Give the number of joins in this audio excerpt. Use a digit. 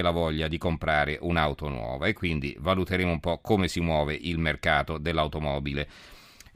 0